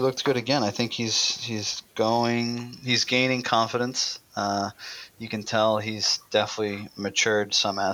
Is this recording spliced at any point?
no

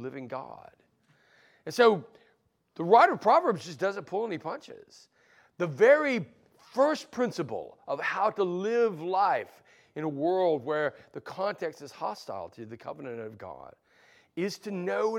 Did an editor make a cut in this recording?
no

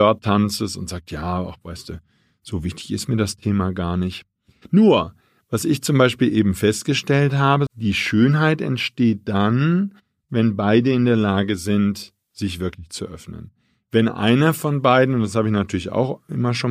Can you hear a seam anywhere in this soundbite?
yes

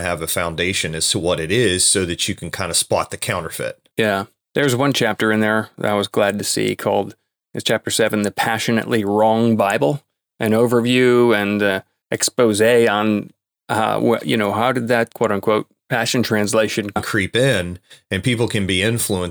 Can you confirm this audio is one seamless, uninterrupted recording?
no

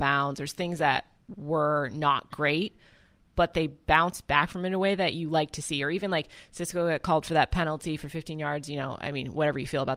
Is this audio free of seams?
yes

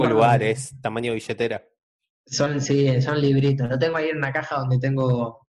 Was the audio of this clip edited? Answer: no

